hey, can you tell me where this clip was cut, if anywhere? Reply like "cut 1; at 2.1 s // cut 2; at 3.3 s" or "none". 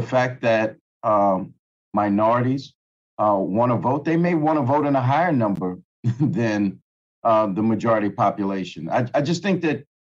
none